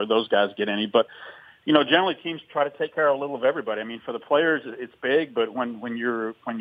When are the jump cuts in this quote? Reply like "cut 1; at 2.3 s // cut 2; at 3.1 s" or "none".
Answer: none